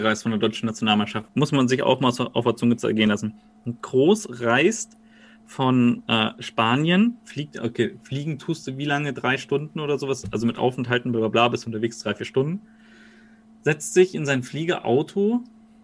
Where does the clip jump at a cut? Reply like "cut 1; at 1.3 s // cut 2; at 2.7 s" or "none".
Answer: none

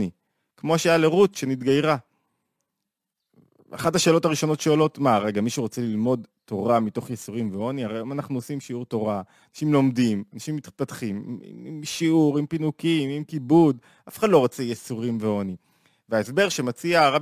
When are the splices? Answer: none

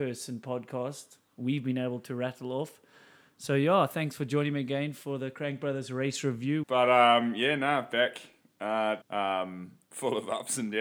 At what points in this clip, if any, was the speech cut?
cut 1; at 6.6 s // cut 2; at 9.0 s

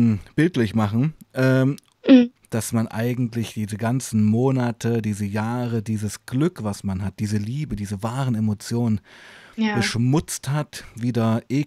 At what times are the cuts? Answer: cut 1; at 2.4 s

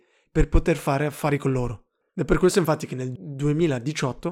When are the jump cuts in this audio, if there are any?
cut 1; at 2.1 s

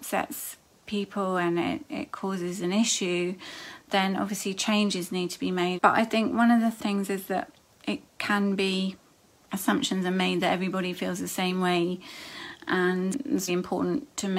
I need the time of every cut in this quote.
cut 1; at 5.8 s // cut 2; at 13.5 s

